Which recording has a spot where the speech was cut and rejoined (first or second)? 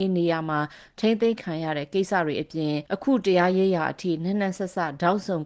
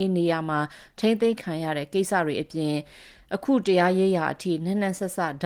first